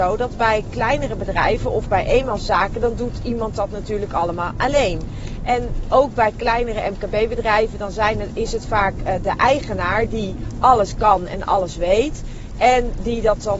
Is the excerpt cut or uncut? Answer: uncut